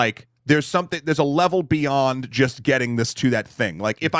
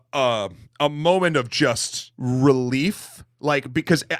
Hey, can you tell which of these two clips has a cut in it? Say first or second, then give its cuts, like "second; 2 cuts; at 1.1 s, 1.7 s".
second; 1 cut; at 2.1 s